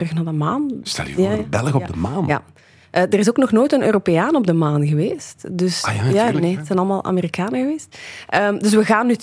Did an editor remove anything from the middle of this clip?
no; 0 cuts

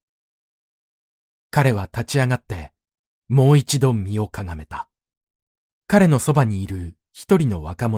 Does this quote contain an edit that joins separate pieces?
yes; 1 cut; at 5.7 s

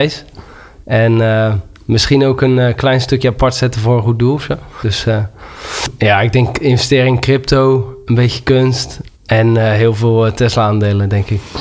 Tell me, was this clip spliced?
yes; 2 cuts; at 4.8 s, 9.1 s

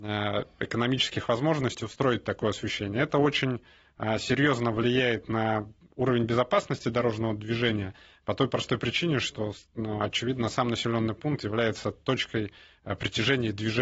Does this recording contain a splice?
no; 0 cuts

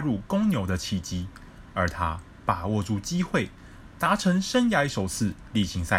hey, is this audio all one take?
yes; 0 cuts

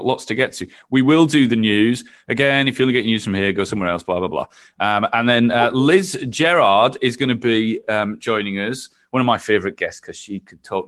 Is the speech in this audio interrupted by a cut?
no; 0 cuts

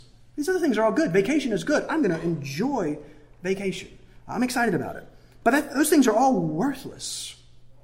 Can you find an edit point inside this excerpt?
no; 0 cuts

